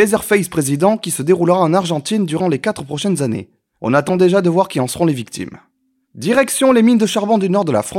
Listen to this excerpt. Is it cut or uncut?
uncut